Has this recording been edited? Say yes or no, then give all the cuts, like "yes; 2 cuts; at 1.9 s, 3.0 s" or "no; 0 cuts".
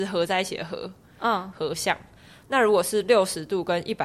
no; 0 cuts